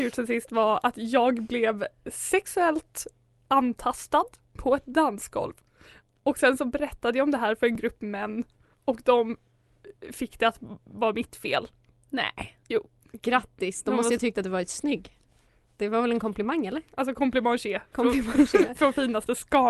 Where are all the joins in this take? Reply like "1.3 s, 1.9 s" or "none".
none